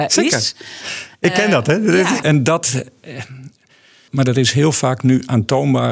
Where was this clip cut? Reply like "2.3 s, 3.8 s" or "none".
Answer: 2.2 s, 4.1 s